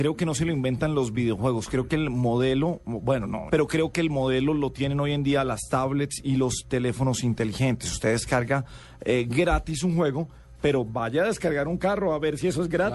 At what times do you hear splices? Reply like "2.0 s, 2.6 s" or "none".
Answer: 3.5 s